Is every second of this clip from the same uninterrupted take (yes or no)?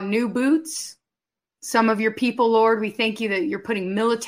yes